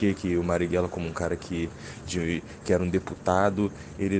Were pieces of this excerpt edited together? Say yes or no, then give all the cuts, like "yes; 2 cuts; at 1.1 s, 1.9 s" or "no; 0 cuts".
no; 0 cuts